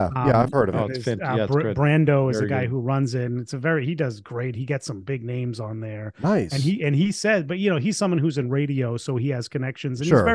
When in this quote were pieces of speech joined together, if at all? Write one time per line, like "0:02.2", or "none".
none